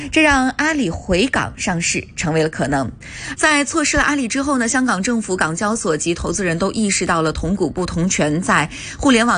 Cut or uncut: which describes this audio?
cut